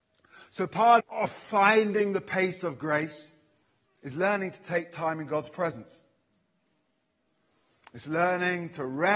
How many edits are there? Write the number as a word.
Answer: two